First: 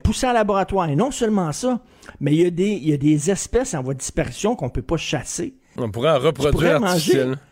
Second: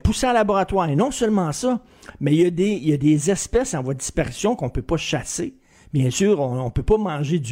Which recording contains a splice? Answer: first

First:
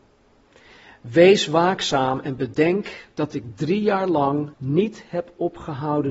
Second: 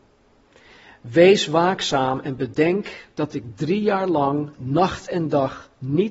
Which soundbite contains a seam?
first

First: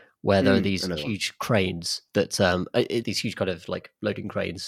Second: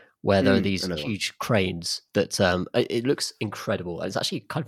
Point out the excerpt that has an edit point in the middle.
first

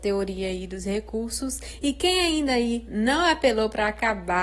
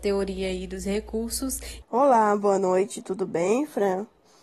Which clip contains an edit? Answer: second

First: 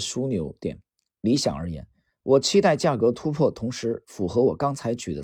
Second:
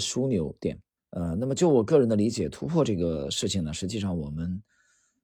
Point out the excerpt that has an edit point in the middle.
second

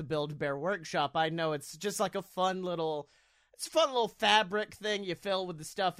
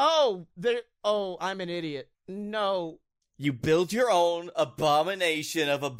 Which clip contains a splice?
second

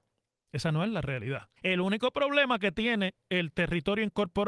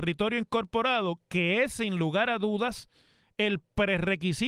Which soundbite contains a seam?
first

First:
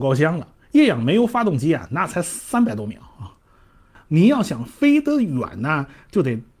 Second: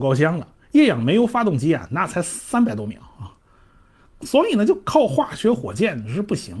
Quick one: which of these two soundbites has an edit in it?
first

